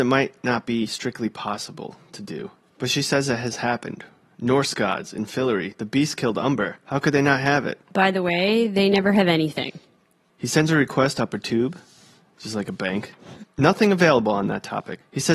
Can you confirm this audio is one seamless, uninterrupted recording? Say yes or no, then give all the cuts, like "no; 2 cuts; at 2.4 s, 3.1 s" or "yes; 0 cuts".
no; 1 cut; at 10.3 s